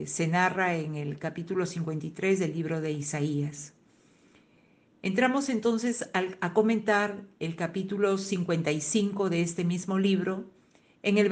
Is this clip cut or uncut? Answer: uncut